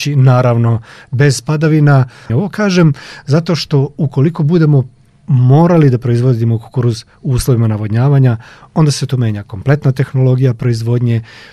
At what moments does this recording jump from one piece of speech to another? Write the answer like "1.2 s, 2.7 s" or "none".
2.3 s